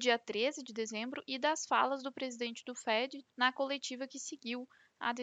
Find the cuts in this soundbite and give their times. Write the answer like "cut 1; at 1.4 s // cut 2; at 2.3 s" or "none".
cut 1; at 3.3 s